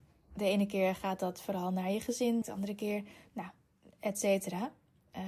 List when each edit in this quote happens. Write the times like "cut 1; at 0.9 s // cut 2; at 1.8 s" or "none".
cut 1; at 2.4 s